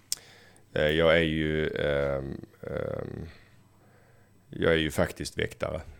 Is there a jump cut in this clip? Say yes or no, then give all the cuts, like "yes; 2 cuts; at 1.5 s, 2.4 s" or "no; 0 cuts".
no; 0 cuts